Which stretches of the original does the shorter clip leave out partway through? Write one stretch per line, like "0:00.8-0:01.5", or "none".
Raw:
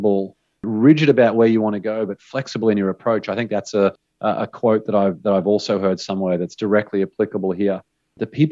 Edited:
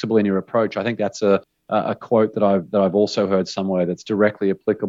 none